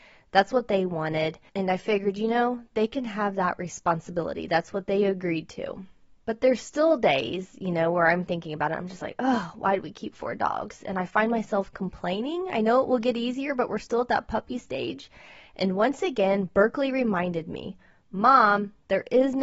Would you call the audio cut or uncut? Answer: uncut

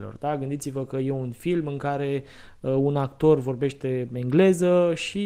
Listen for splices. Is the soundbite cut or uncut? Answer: uncut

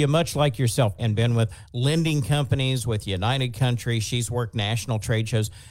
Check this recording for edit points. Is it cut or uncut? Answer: cut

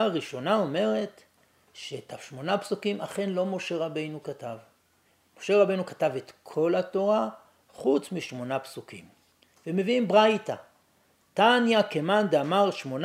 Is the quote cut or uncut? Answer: uncut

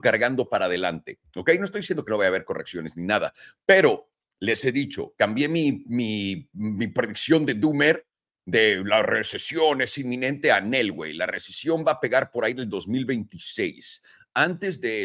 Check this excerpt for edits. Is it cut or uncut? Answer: uncut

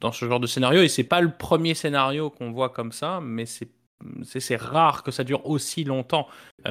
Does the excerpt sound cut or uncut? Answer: cut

